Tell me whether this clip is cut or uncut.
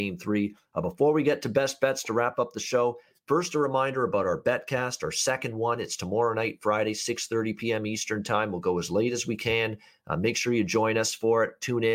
uncut